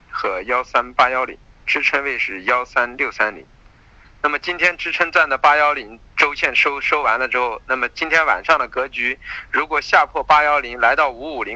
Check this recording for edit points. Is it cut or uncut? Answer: cut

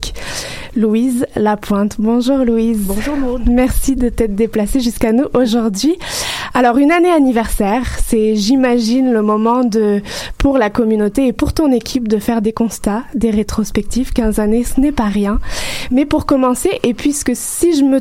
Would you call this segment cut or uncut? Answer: uncut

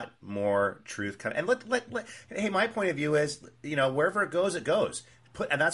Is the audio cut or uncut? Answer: uncut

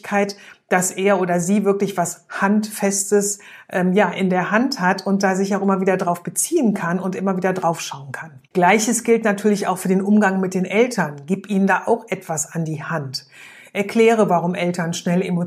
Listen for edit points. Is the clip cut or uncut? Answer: cut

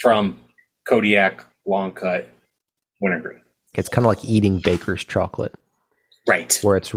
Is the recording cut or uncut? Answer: cut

